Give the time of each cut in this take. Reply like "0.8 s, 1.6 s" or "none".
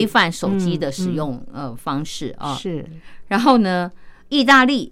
none